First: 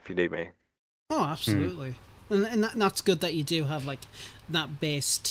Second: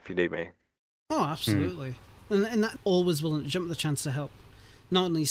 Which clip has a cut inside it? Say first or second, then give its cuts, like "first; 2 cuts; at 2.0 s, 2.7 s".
second; 1 cut; at 2.8 s